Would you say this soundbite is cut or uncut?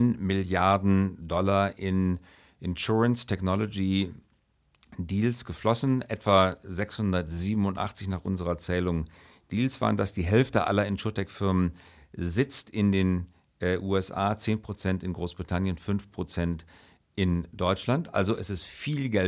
uncut